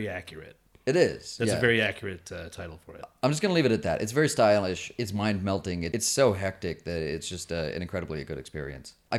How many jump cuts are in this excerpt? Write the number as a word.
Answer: zero